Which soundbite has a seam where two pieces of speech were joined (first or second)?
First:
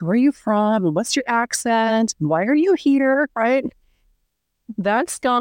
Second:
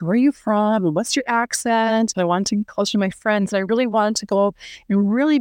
second